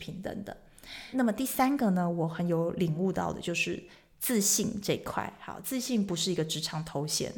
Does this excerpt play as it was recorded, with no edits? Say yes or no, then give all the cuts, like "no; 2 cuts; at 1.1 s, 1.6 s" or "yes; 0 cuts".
yes; 0 cuts